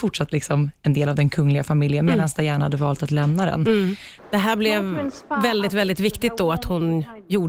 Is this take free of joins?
no; 1 cut; at 4.2 s

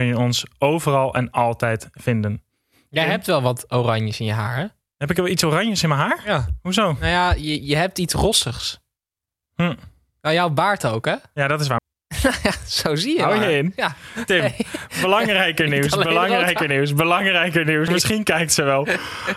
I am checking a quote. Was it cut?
yes; 2 cuts; at 11.8 s, 17.9 s

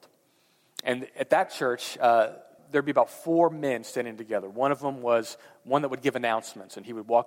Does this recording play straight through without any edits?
no; 1 cut; at 2.6 s

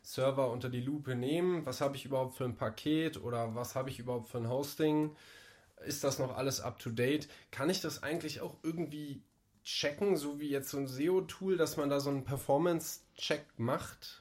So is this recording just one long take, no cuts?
yes; 0 cuts

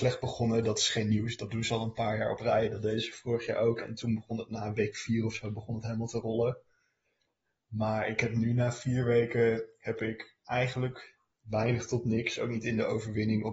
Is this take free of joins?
yes; 0 cuts

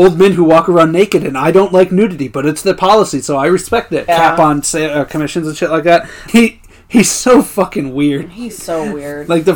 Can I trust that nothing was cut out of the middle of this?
no; 2 cuts; at 4.1 s, 6.3 s

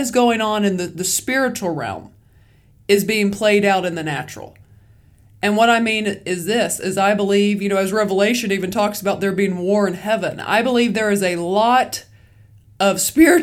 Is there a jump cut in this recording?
no; 0 cuts

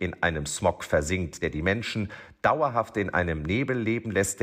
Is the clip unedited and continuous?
yes; 0 cuts

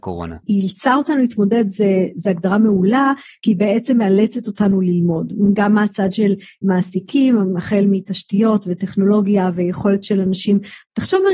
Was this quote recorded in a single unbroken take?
yes; 0 cuts

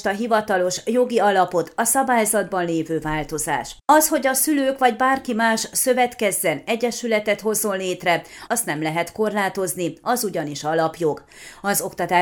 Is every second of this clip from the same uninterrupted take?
no; 1 cut; at 8.5 s

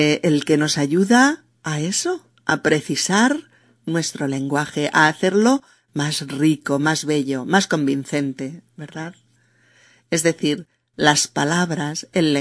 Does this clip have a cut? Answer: no; 0 cuts

